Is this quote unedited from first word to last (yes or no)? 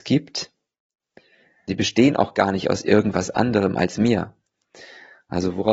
no